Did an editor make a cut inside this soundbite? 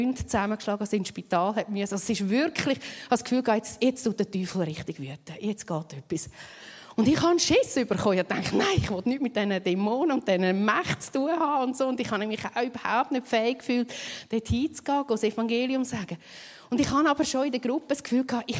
no; 0 cuts

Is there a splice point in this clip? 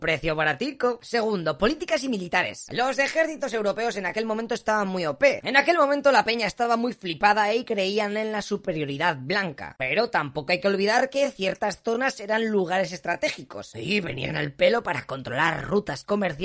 yes; 2 cuts; at 5.4 s, 9.8 s

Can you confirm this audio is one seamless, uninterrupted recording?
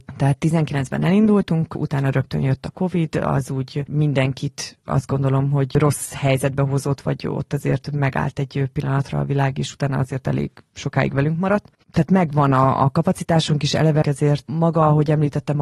no; 2 cuts; at 11.8 s, 14.0 s

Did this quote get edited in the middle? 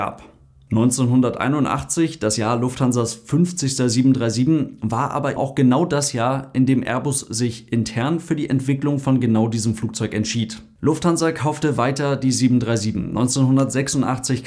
yes; 1 cut; at 5.4 s

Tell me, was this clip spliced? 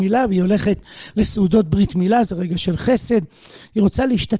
yes; 1 cut; at 2.3 s

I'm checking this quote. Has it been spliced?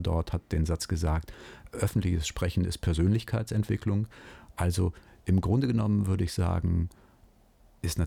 no; 0 cuts

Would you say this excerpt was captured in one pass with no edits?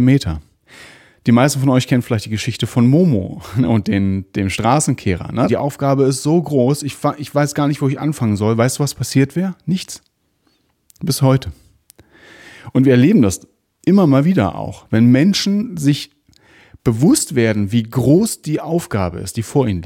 no; 1 cut; at 5.5 s

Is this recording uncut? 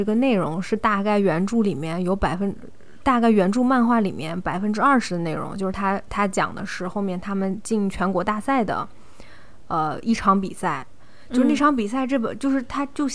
yes; 0 cuts

